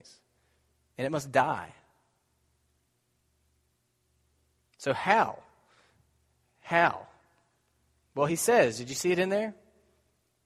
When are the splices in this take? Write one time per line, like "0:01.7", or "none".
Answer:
none